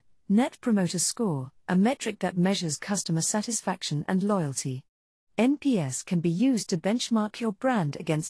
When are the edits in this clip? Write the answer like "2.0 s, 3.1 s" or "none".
1.6 s